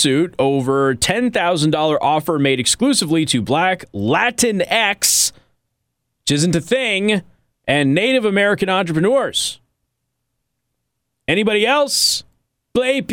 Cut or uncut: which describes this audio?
uncut